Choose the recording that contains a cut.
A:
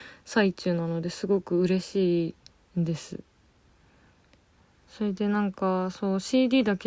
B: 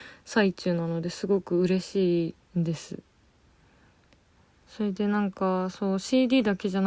B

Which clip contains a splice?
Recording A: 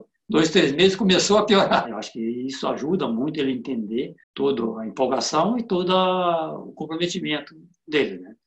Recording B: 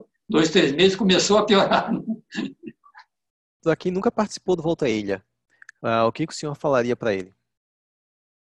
A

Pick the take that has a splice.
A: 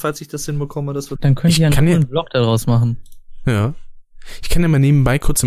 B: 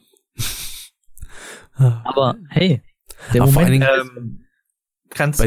A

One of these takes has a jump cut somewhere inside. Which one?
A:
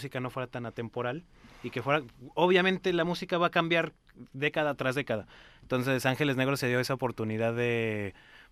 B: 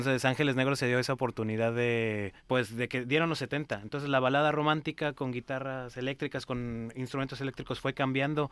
B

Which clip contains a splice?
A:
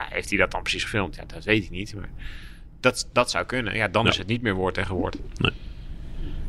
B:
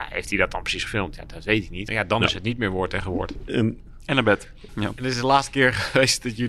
B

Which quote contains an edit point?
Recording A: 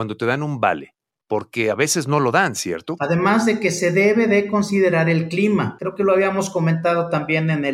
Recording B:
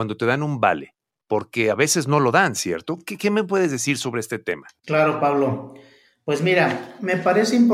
A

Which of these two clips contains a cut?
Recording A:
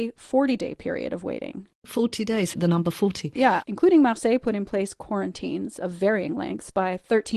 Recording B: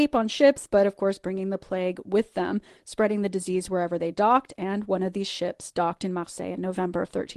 A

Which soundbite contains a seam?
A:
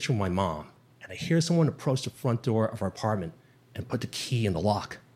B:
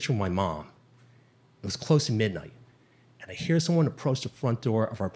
A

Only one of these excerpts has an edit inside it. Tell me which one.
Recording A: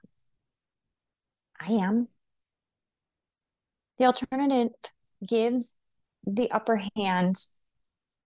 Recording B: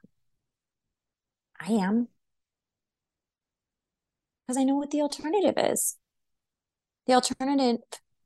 A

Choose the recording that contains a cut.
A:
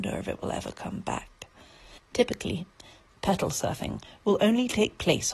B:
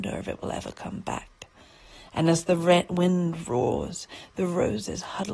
A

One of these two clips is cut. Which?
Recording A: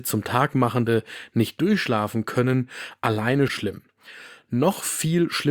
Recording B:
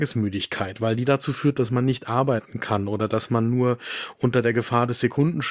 A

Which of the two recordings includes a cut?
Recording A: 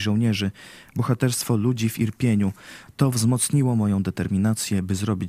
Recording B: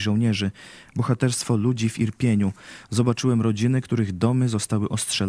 A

